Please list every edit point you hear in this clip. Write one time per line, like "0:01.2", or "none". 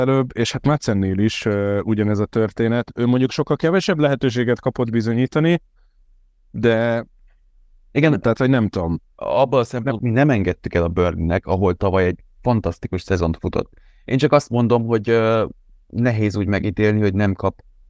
0:10.0